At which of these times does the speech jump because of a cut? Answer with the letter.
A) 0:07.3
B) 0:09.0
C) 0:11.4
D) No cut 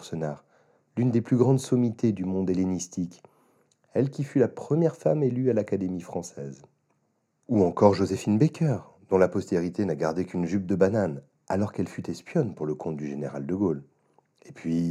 D